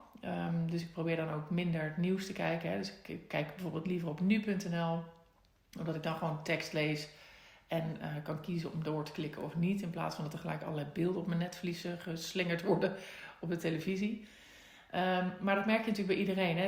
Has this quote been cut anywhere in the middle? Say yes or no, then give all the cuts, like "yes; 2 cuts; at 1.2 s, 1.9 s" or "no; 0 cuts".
no; 0 cuts